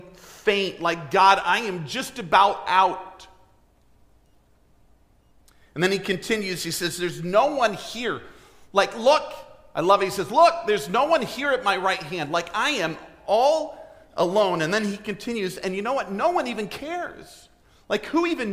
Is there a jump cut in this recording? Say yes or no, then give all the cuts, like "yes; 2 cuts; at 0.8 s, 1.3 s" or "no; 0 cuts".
no; 0 cuts